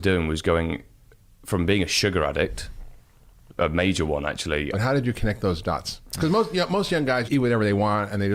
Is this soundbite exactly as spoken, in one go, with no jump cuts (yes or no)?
no